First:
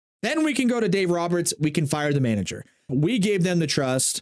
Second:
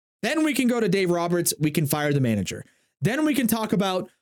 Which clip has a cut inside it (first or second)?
first